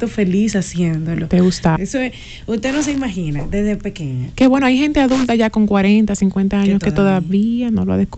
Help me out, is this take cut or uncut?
cut